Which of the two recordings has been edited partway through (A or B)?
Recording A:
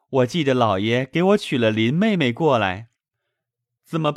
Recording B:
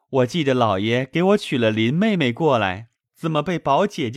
B